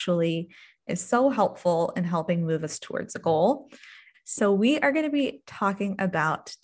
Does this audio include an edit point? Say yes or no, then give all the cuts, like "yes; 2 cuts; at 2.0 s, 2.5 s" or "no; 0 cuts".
yes; 1 cut; at 4.1 s